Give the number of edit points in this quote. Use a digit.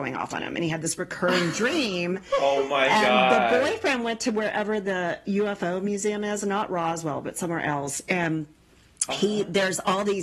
0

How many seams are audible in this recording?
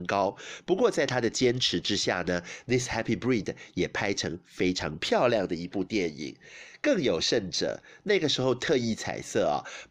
0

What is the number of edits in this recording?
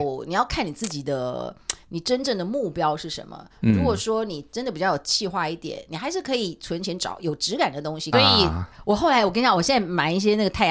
1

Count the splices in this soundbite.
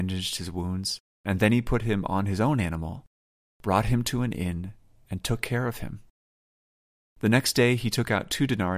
1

